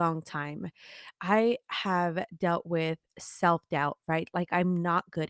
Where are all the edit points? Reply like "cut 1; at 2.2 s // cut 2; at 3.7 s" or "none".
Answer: none